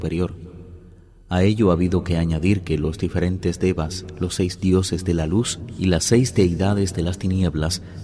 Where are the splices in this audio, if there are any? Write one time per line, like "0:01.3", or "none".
none